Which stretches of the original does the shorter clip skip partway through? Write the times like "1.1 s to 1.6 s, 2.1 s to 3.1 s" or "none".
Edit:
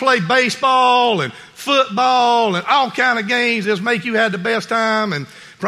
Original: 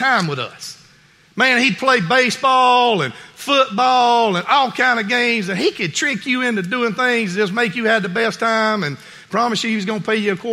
5.5 s to 7.4 s